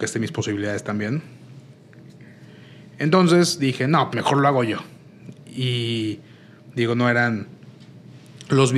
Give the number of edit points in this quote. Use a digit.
1